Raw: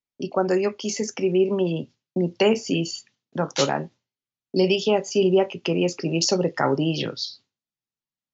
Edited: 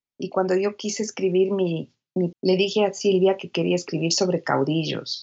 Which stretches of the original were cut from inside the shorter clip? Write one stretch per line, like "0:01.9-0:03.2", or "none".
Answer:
0:02.3-0:04.4